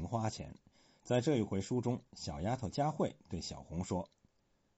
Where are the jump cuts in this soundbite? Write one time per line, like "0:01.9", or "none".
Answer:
0:01.0